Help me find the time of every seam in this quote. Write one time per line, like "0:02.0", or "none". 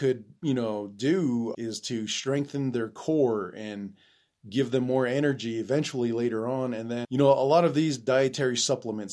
0:01.5
0:07.0